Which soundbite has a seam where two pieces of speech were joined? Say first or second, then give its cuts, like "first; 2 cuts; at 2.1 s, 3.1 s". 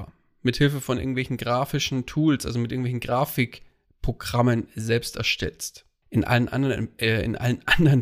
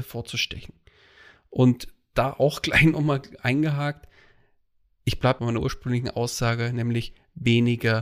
first; 1 cut; at 6.0 s